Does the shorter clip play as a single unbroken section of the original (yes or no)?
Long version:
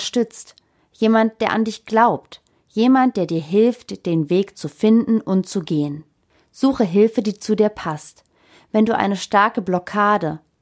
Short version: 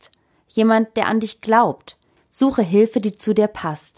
no